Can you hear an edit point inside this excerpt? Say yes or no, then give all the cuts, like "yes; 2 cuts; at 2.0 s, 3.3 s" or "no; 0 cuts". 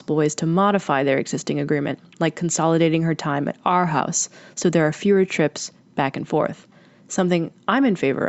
no; 0 cuts